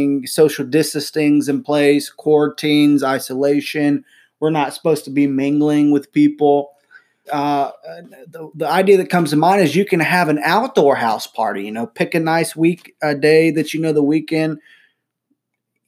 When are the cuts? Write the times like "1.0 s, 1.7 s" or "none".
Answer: 7.3 s